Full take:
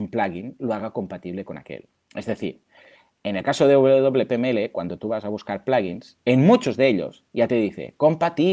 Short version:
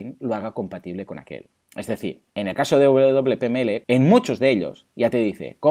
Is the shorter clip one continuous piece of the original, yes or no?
no